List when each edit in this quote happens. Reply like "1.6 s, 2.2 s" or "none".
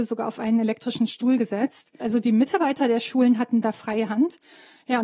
2.0 s